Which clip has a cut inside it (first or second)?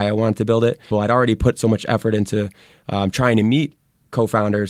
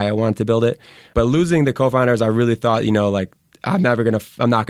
first